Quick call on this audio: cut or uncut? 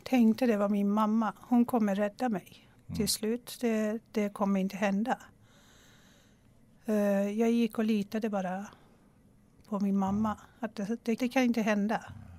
cut